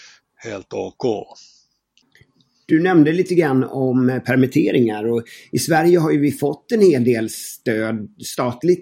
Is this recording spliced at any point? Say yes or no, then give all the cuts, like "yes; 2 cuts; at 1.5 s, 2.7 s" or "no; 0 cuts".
no; 0 cuts